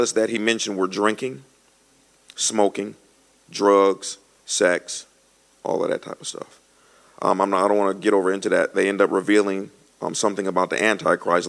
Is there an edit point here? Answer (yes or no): no